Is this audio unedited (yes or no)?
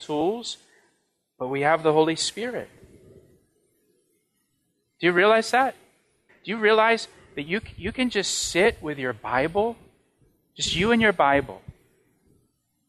no